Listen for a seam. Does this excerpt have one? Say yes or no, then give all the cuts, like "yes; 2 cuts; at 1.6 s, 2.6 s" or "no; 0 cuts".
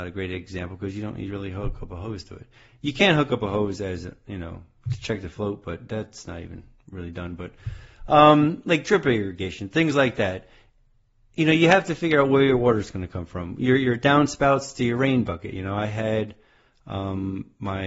no; 0 cuts